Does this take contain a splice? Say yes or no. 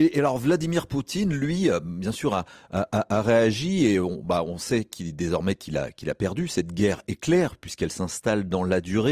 no